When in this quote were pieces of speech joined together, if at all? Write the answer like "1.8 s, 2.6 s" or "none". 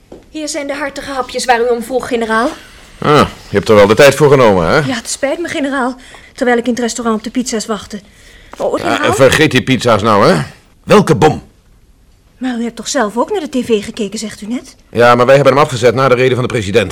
6.2 s, 8.8 s, 10.7 s